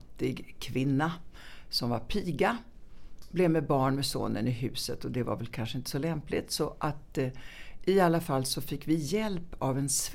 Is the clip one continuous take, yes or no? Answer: yes